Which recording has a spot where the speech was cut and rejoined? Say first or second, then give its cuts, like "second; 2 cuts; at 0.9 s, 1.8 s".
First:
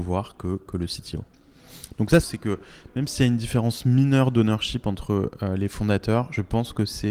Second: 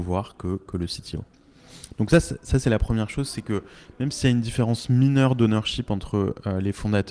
first; 1 cut; at 2.2 s